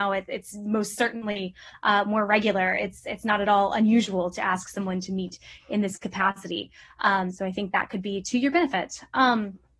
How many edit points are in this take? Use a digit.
0